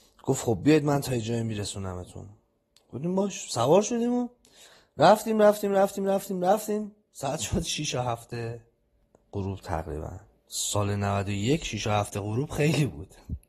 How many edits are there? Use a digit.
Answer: 0